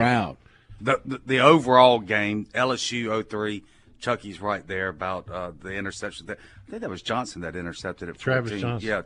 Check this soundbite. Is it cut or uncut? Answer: uncut